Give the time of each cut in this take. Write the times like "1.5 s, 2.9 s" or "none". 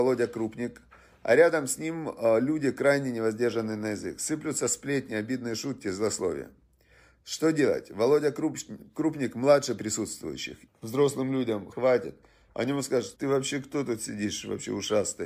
10.7 s, 11.7 s, 13.1 s